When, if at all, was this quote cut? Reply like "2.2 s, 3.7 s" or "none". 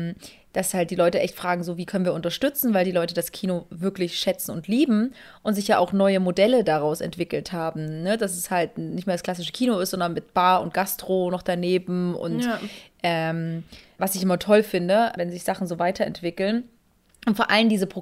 14.0 s, 15.2 s